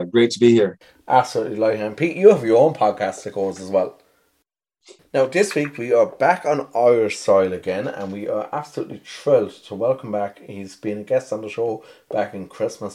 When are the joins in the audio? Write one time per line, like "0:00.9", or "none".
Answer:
0:05.0